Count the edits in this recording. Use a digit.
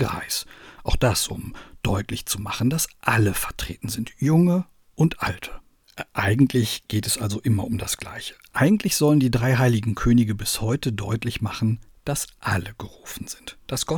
0